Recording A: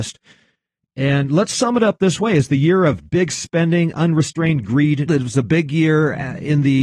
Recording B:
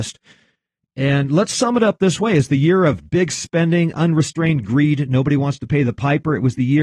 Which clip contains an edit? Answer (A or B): A